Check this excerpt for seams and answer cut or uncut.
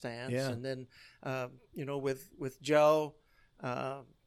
uncut